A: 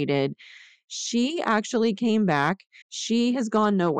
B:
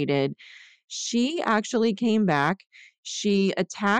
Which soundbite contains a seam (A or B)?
A